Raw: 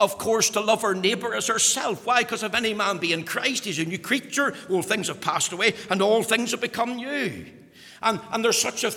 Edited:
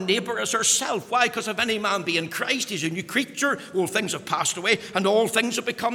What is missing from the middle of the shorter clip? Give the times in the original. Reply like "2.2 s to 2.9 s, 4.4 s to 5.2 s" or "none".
none